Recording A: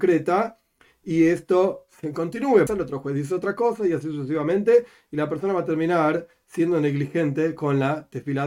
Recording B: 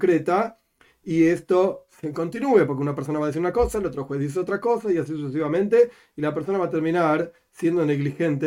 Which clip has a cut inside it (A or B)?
A